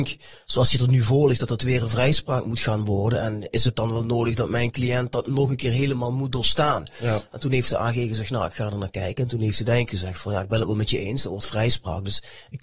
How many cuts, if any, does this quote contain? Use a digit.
0